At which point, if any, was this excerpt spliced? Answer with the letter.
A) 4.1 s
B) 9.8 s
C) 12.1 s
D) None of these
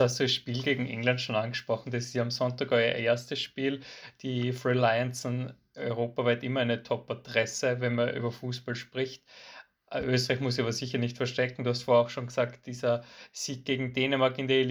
D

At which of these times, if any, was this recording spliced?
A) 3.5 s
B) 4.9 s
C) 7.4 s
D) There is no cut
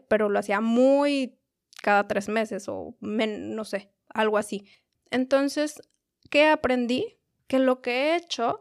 B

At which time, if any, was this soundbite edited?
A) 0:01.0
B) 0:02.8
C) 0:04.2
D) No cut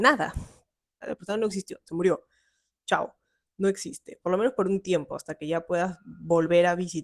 A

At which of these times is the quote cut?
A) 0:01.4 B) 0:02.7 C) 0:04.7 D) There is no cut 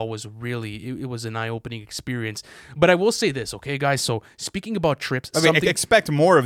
D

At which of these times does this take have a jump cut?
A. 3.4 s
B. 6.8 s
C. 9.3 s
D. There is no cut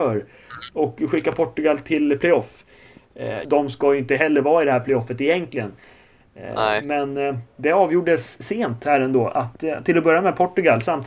A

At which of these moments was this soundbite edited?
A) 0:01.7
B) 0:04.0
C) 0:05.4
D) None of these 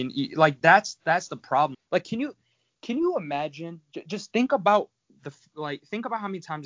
A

